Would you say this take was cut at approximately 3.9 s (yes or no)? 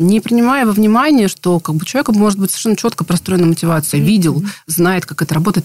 yes